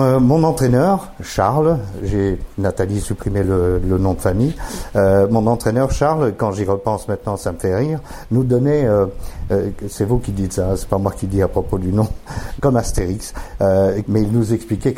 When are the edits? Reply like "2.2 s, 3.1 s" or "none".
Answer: 12.6 s, 14.0 s